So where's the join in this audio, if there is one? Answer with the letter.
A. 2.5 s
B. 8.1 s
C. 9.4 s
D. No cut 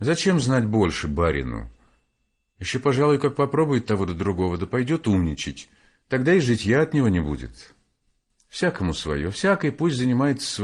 D